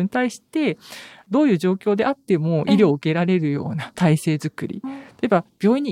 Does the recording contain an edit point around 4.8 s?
no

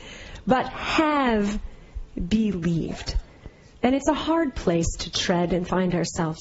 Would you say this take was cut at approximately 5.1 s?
no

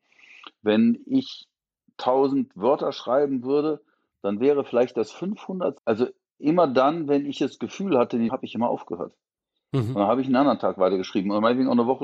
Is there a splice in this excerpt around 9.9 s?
no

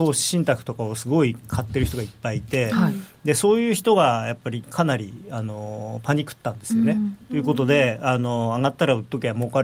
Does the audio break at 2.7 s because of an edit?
no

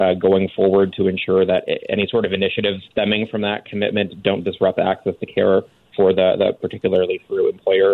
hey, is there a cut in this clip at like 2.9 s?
yes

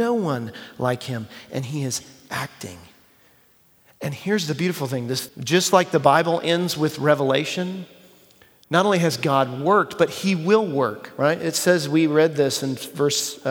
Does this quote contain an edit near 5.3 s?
yes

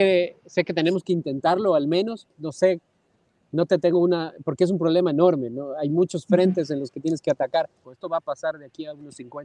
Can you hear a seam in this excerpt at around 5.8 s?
no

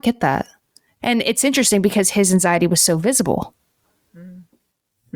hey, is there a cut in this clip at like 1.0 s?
yes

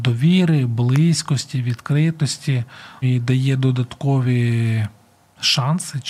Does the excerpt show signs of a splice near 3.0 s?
yes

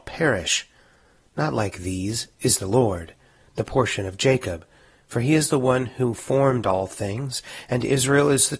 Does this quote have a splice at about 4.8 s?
no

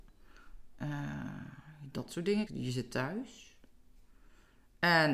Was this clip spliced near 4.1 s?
no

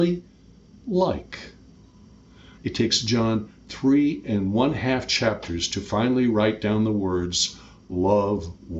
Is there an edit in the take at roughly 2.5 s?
yes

